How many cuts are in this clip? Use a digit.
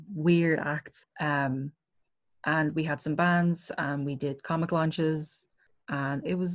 1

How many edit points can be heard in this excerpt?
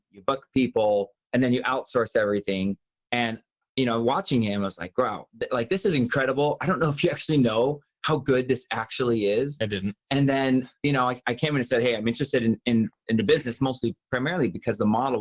0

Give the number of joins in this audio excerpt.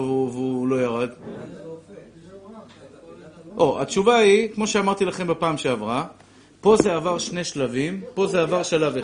1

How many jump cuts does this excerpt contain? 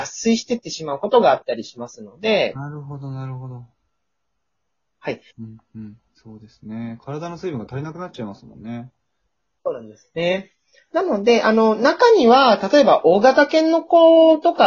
1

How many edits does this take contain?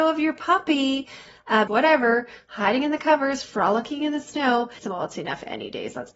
2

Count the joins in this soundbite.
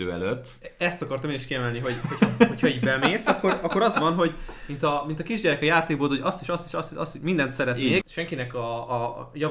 1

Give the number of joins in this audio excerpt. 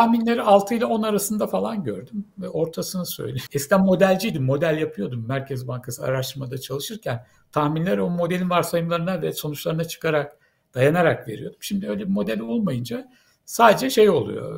1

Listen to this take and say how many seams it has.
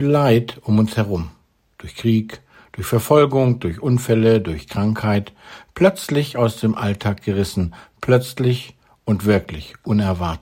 0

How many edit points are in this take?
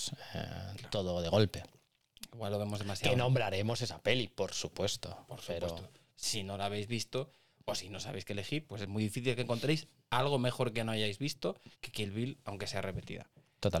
2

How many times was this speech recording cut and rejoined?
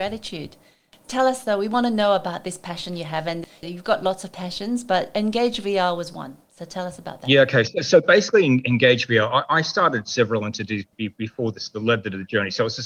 0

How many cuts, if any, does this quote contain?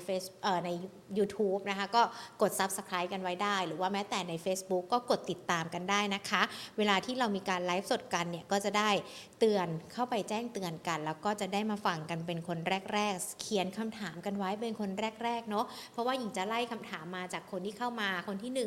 0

